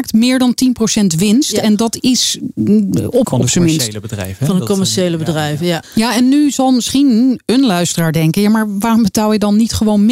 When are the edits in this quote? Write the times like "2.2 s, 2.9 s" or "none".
3.2 s, 5.8 s